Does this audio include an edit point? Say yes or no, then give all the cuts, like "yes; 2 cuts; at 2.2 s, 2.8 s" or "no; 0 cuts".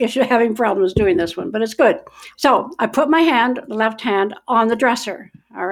yes; 1 cut; at 2.3 s